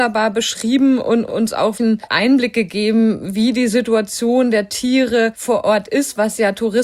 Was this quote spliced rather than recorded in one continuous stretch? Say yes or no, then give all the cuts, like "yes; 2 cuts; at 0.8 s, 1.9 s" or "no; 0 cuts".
yes; 1 cut; at 1.8 s